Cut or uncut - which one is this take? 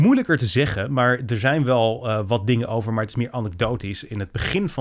uncut